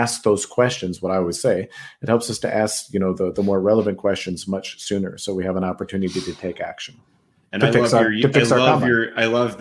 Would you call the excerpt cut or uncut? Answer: uncut